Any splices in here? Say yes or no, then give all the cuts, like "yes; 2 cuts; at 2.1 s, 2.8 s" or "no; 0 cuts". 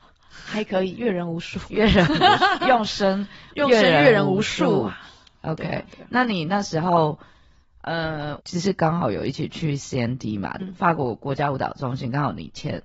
yes; 2 cuts; at 8.4 s, 10.6 s